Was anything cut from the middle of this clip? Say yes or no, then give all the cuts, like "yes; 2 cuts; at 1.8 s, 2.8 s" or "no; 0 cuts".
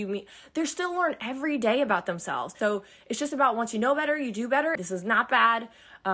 yes; 2 cuts; at 2.6 s, 4.8 s